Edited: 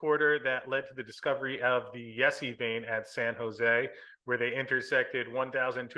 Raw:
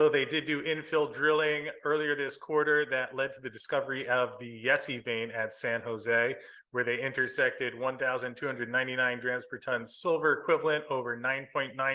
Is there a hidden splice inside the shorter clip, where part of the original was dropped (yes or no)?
no